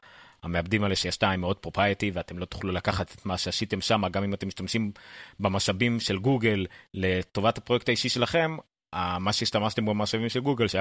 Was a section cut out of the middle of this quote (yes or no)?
no